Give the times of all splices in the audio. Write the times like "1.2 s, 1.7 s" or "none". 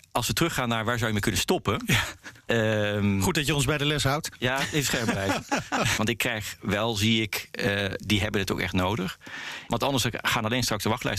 6.0 s, 8.0 s, 9.7 s